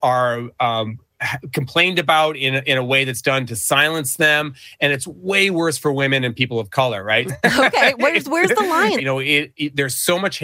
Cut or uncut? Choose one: cut